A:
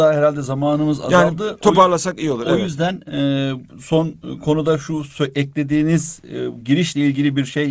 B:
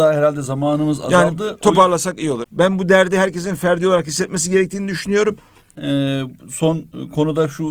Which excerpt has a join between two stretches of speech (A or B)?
B